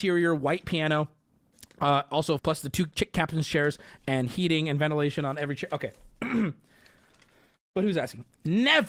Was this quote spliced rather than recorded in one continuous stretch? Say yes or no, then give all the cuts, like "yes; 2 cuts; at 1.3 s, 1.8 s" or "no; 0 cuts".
yes; 1 cut; at 2.4 s